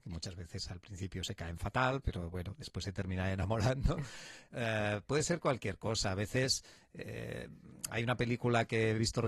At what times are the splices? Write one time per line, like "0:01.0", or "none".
none